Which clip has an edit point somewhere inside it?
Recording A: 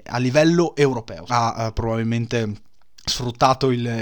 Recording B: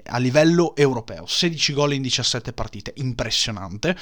A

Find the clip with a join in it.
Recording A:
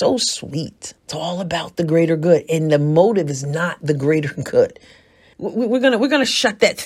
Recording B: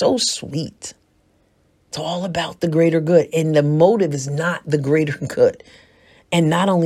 A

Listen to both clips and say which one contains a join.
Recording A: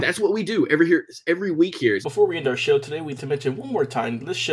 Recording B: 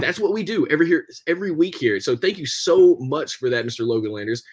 A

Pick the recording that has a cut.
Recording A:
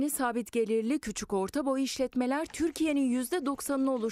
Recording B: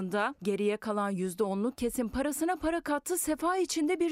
A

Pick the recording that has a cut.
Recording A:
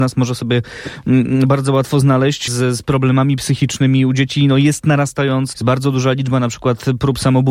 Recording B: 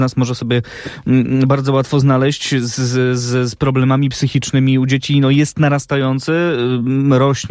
A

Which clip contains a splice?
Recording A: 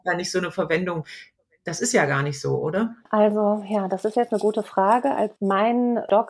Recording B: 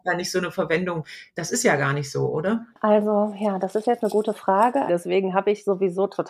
B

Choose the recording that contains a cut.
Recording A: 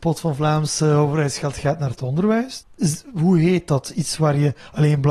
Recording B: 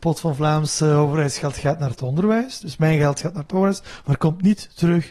A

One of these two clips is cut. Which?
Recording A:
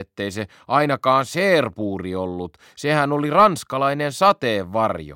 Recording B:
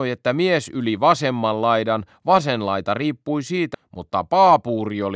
B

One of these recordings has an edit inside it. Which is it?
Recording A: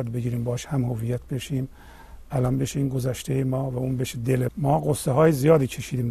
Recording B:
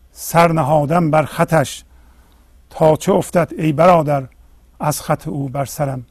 A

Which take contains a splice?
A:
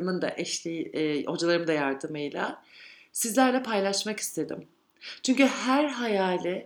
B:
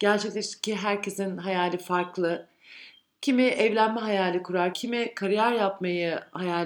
B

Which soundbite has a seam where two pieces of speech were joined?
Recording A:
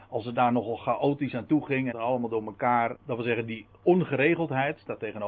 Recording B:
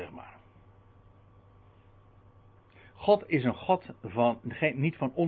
A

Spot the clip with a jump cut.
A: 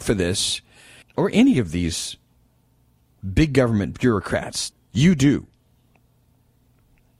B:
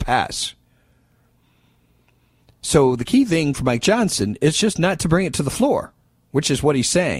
A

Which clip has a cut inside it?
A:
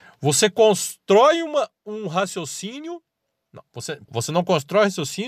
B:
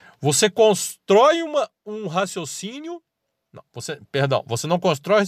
A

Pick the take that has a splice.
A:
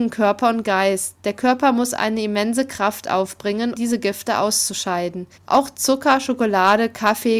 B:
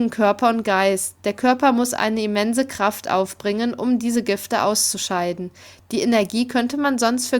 A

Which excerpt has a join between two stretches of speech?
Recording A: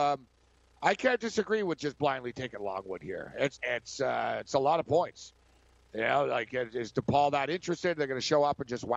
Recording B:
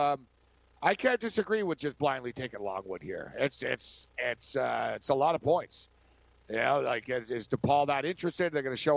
A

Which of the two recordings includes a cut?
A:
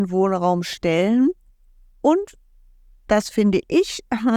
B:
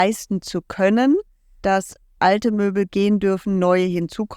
B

